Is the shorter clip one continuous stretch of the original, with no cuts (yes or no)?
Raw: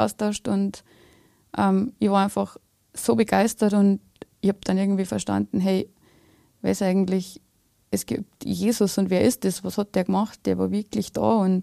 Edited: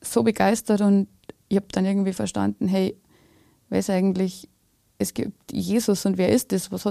yes